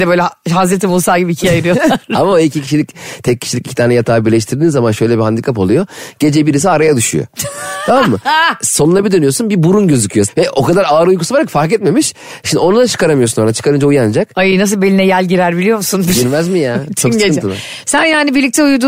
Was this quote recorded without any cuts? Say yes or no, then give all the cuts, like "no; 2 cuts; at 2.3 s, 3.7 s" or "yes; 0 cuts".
no; 1 cut; at 10.3 s